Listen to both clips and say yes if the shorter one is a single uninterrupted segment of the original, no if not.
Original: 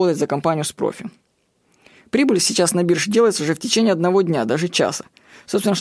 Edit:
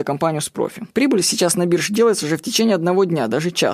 no